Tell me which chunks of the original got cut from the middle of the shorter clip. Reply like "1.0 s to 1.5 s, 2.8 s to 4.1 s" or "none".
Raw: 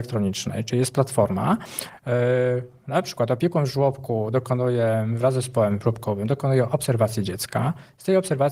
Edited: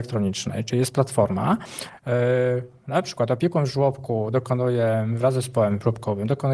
none